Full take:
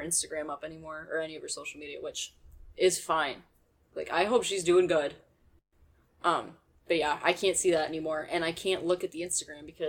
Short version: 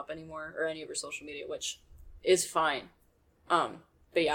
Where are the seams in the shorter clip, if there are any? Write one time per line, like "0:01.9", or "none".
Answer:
0:03.3